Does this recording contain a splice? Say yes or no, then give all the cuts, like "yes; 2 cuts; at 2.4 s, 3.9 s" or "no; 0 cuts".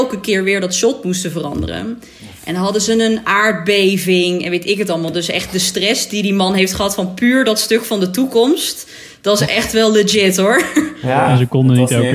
no; 0 cuts